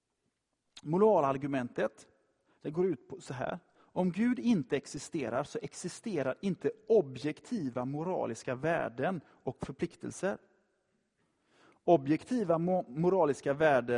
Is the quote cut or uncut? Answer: uncut